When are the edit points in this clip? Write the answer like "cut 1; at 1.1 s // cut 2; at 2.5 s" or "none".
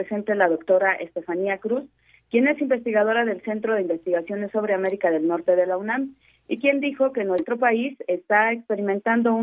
none